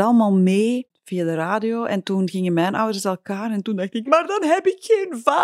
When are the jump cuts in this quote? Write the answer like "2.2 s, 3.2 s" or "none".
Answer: 4.1 s